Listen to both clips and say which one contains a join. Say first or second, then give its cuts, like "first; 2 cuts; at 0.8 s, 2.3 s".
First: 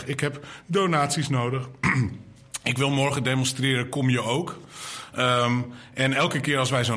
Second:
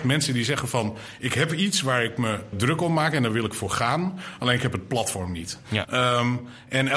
second; 2 cuts; at 2.5 s, 5.8 s